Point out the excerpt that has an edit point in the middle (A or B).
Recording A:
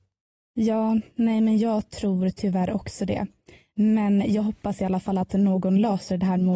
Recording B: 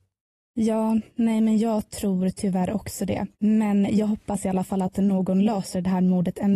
B